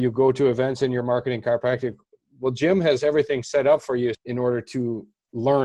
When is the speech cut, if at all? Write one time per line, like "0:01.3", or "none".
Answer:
0:04.1